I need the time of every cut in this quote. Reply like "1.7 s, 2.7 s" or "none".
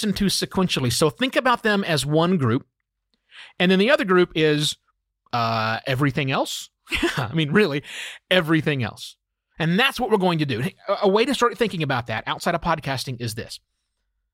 none